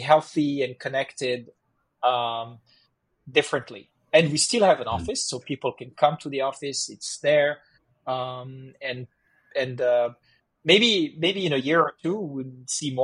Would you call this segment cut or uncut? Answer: uncut